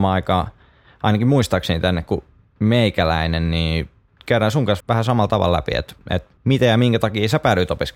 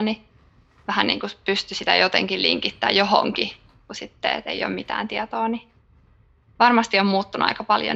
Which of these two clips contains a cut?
first; 2 cuts; at 4.8 s, 6.4 s

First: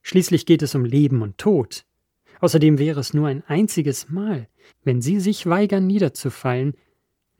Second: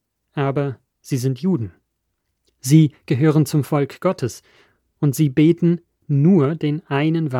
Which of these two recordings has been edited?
first; 1 cut; at 4.7 s

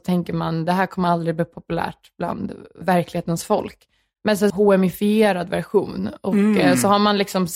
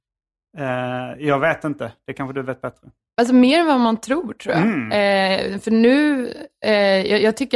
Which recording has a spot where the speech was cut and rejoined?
first; 2 cuts; at 2.8 s, 4.5 s

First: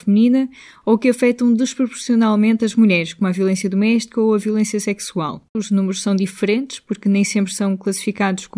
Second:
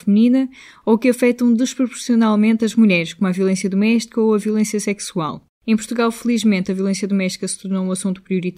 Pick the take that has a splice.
first; 1 cut; at 5.5 s

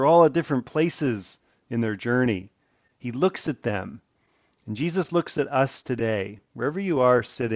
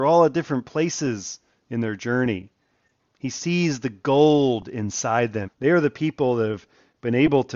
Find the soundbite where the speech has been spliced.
second; 2 cuts; at 3.0 s, 5.4 s

